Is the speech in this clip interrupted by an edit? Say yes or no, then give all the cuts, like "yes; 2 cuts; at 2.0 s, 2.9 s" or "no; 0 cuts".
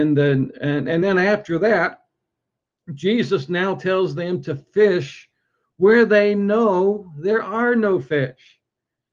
no; 0 cuts